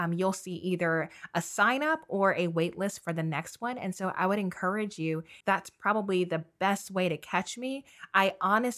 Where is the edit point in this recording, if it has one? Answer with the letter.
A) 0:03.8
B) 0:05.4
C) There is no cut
B